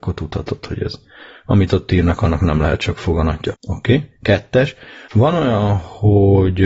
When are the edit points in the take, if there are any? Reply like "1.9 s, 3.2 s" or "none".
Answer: 3.5 s, 5.1 s

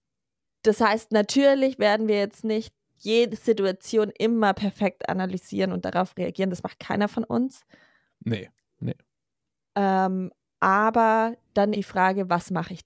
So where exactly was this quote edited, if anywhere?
11.7 s

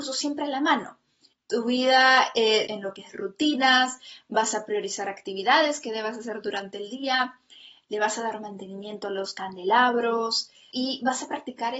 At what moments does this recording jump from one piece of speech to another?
1.3 s, 2.7 s

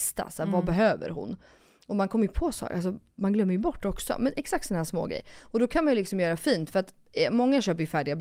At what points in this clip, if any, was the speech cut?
none

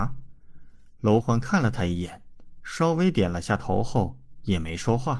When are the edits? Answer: 1.2 s

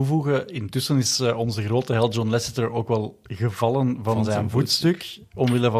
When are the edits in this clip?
none

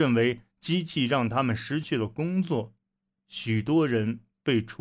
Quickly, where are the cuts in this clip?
3.1 s

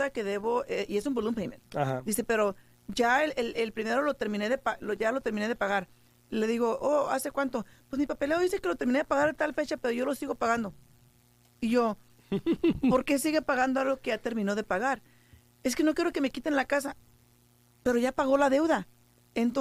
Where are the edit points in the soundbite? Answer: none

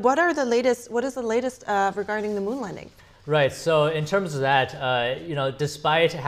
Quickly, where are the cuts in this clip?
none

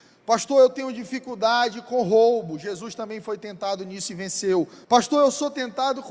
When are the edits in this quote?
4.8 s

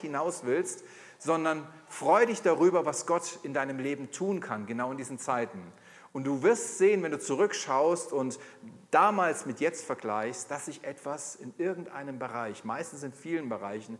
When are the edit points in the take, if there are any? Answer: none

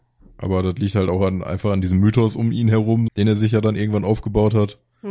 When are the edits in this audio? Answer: 3.1 s

